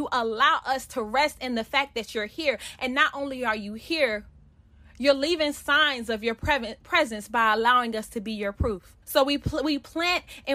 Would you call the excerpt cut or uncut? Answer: cut